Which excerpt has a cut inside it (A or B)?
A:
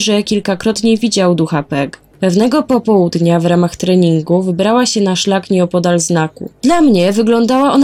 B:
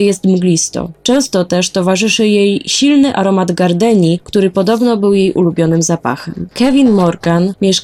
A